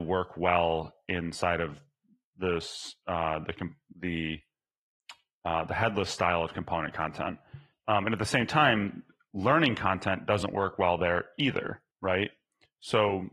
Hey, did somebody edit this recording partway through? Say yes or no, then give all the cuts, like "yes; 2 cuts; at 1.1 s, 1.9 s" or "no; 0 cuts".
yes; 2 cuts; at 7.7 s, 11.9 s